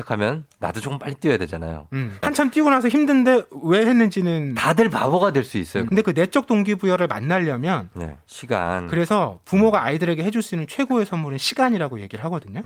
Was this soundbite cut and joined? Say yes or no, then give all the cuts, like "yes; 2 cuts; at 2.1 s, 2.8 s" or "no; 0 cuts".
yes; 3 cuts; at 2.2 s, 5.9 s, 8.3 s